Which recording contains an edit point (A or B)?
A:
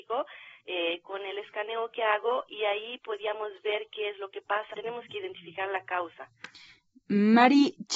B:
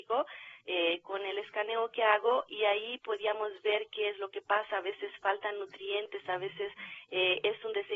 A